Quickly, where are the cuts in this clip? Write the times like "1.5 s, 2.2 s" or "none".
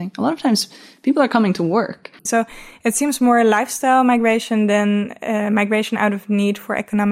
2.3 s